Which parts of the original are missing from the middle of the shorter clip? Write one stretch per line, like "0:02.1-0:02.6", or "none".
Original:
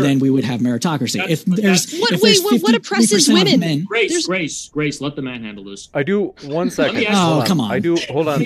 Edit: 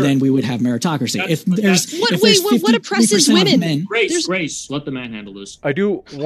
0:04.7-0:05.0